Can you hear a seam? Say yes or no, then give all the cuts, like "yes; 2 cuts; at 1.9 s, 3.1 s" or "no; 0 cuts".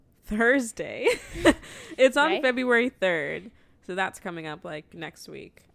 no; 0 cuts